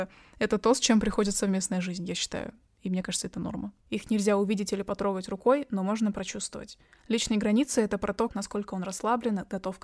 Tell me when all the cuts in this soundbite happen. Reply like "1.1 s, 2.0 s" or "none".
3.8 s, 8.3 s